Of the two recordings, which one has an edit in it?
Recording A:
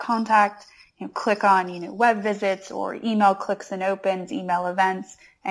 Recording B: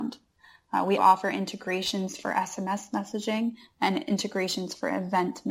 B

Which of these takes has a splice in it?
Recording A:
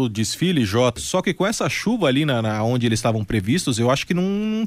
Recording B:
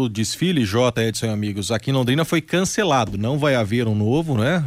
A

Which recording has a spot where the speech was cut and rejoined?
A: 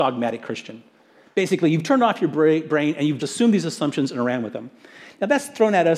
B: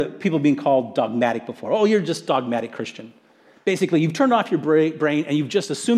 A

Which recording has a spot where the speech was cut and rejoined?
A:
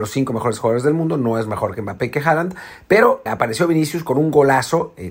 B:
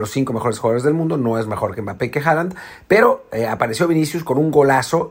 A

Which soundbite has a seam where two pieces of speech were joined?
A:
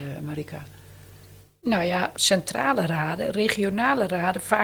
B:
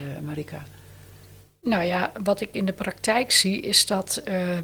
A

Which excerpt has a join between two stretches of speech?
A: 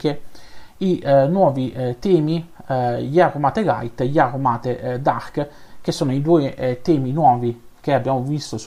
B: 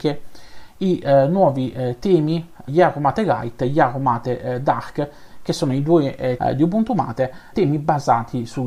B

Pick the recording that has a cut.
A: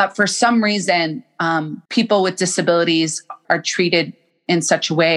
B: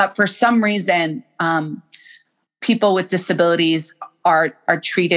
A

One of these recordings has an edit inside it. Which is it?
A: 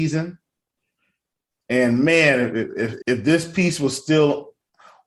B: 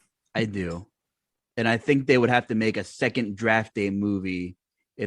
A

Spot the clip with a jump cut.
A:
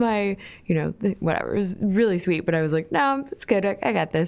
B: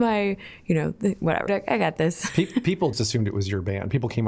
B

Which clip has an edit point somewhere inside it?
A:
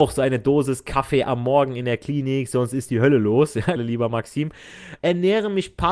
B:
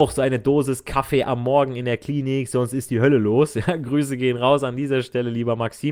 A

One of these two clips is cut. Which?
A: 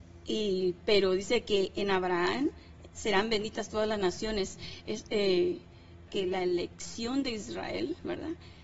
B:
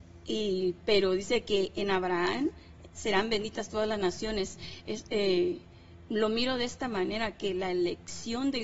A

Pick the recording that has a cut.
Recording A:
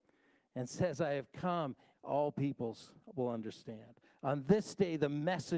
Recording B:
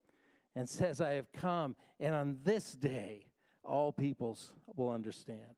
A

